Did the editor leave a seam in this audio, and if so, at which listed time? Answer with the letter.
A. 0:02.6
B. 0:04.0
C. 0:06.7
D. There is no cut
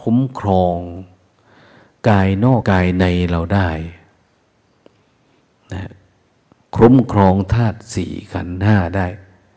A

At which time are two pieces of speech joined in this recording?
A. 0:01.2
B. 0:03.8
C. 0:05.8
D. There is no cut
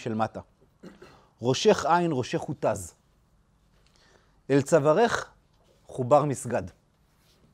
D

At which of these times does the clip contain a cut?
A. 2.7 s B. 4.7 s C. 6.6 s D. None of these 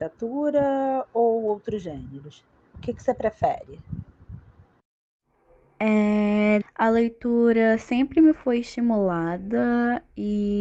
C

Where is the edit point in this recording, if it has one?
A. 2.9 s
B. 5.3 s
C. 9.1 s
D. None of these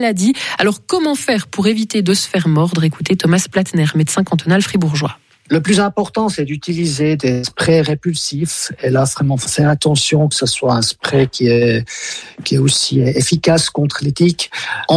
D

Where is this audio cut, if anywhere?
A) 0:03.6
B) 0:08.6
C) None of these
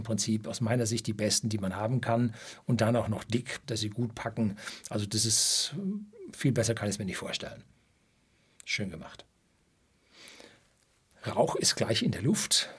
A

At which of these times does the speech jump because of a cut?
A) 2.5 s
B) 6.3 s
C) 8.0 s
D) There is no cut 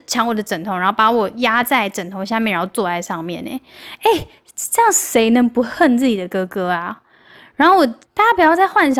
C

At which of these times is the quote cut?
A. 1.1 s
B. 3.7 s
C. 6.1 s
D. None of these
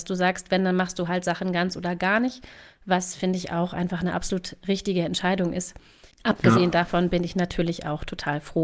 C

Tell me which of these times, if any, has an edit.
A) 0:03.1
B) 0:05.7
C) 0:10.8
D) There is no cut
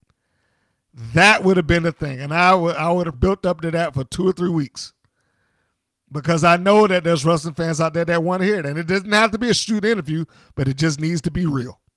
A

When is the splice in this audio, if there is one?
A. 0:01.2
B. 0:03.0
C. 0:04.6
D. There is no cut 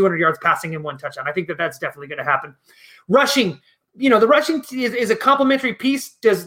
D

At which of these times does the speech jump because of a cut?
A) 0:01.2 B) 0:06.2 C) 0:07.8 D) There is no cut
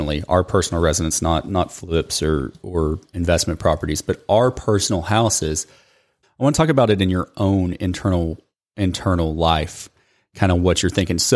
B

